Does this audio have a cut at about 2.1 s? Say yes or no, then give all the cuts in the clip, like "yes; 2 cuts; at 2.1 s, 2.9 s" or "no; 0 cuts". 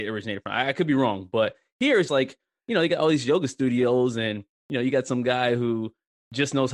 yes; 1 cut; at 2.1 s